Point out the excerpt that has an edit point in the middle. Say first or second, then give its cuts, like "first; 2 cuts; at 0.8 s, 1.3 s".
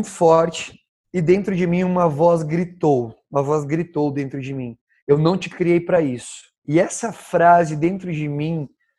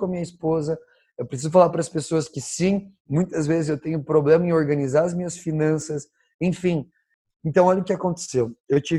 first; 1 cut; at 6.6 s